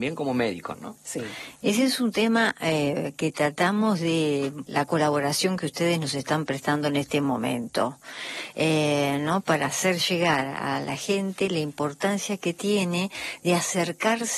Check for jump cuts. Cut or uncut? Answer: cut